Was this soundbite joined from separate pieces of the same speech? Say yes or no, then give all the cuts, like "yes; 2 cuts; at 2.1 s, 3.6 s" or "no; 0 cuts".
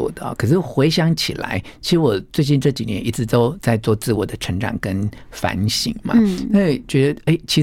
no; 0 cuts